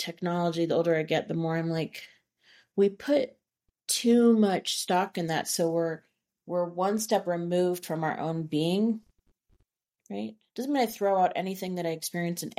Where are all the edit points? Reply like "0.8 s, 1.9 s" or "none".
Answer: none